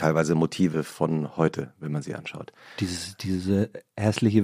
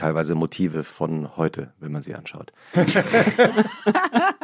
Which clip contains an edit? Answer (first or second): second